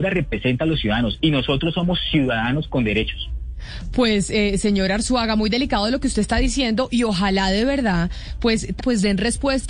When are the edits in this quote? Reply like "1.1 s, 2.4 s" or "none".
8.8 s